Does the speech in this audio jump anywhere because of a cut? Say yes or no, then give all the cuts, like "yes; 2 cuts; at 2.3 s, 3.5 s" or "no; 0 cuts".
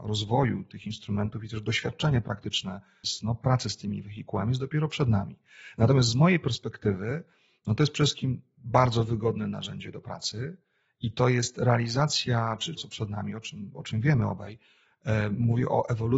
yes; 2 cuts; at 3.0 s, 12.8 s